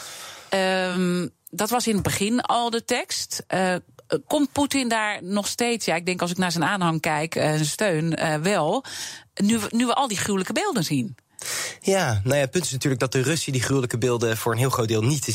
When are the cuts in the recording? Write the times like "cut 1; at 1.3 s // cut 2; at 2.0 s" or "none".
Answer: none

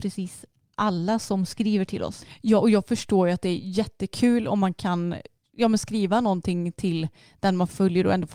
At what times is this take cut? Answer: none

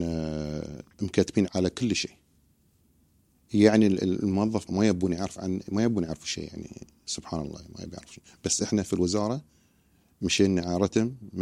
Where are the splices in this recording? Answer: cut 1; at 1.5 s // cut 2; at 4.7 s

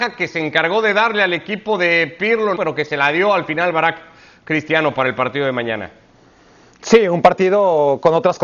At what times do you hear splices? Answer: cut 1; at 2.6 s

